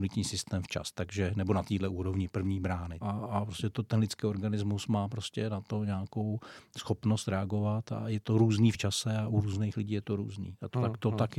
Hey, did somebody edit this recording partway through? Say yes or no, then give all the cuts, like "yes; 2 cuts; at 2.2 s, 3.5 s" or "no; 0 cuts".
yes; 1 cut; at 3.0 s